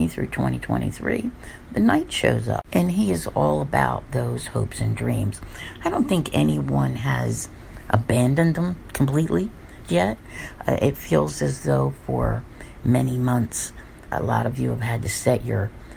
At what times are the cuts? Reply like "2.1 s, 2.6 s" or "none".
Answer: 9.8 s, 14.1 s